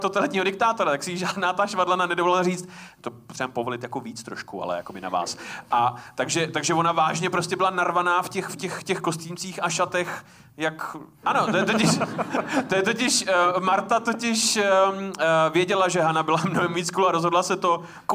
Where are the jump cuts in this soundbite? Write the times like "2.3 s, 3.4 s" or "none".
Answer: 11.2 s